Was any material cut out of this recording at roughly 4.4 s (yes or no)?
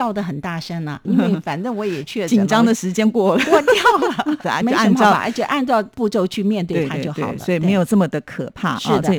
yes